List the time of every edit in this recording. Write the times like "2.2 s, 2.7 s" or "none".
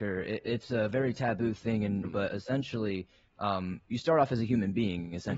2.0 s, 3.9 s